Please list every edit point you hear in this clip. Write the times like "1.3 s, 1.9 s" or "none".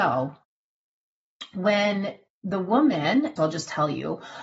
3.4 s